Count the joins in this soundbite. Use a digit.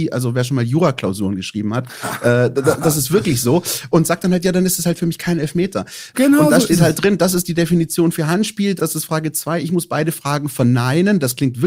2